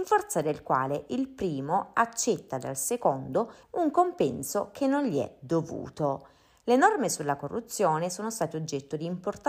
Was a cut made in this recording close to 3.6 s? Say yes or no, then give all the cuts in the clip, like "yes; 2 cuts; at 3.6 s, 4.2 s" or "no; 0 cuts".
yes; 1 cut; at 3.6 s